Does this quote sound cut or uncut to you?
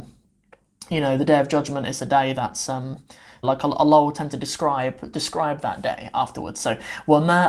cut